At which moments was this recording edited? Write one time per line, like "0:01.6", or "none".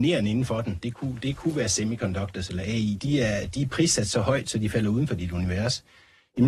0:03.0